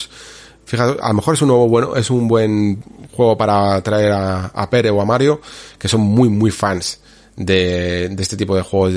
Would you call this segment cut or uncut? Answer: uncut